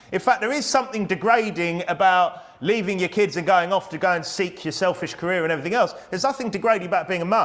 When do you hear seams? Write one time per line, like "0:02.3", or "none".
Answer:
none